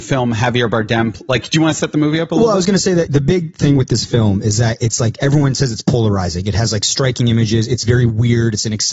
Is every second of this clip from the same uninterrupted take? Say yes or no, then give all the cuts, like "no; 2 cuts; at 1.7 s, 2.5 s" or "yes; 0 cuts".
yes; 0 cuts